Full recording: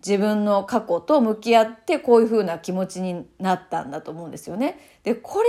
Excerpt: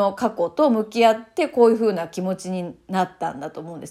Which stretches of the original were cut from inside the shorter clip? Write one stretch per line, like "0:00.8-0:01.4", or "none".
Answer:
none